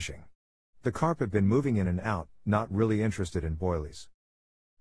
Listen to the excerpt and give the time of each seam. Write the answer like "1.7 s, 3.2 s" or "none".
none